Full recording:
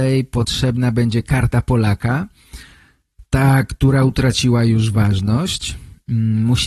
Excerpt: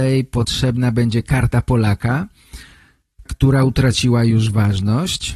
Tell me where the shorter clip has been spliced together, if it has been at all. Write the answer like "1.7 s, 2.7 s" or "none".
3.3 s